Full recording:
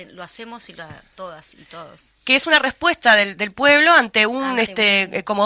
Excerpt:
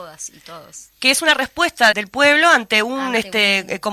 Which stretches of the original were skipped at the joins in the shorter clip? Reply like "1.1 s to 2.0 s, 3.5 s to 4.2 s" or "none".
3.2 s to 3.3 s